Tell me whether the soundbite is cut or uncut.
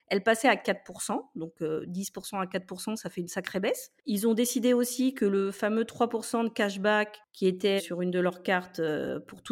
cut